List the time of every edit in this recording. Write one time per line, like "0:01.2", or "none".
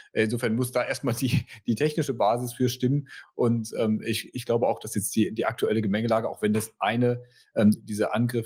none